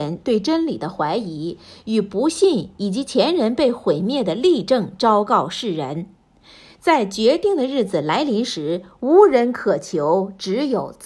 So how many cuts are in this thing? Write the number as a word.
zero